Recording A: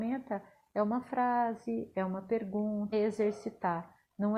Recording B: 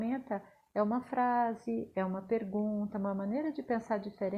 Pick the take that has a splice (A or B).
A